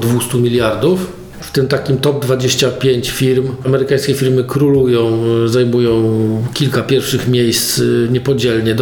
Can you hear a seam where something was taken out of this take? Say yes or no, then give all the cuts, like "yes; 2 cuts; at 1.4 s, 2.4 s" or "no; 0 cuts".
yes; 1 cut; at 1.4 s